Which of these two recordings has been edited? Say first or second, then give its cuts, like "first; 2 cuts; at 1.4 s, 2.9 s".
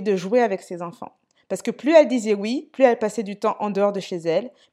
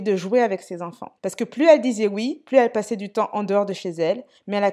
second; 1 cut; at 1.2 s